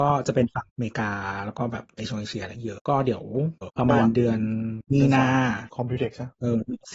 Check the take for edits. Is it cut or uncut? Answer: cut